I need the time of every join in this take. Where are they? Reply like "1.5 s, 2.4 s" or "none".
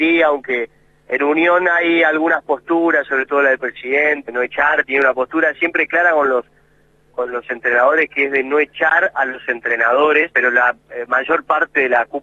4.3 s, 10.3 s